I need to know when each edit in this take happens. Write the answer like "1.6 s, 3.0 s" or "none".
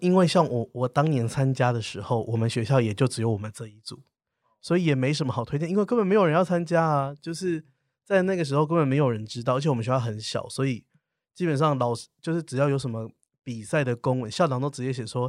none